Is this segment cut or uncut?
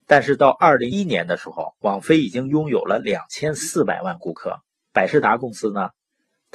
cut